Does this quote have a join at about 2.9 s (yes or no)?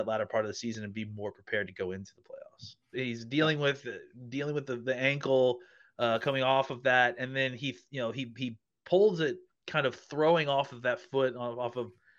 yes